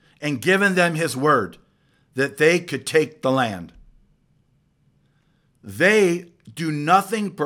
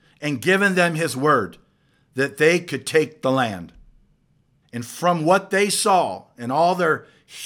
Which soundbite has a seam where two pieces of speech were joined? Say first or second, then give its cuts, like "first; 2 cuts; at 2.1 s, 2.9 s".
second; 1 cut; at 4.6 s